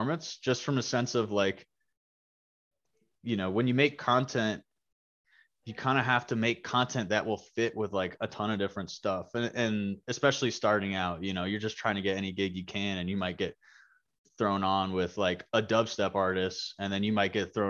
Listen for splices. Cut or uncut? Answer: uncut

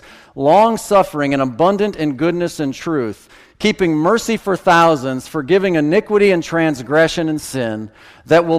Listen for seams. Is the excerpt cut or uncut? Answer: uncut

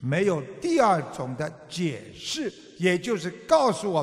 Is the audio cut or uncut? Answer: uncut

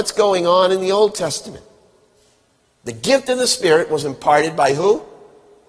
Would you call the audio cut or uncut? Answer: uncut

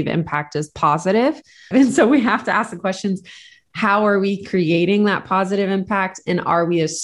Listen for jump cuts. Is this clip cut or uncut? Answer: cut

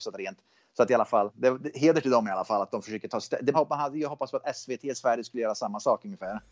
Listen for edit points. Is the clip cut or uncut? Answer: cut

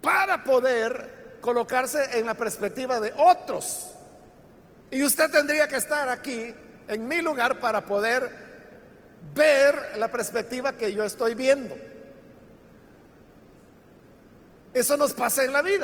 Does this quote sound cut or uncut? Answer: cut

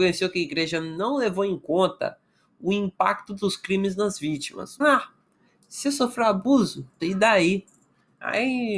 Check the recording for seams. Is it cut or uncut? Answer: cut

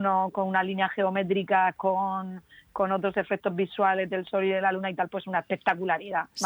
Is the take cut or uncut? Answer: uncut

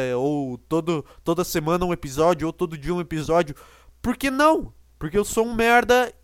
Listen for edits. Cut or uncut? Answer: cut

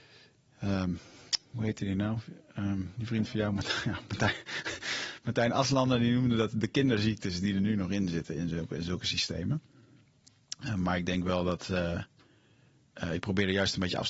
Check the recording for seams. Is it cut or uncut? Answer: uncut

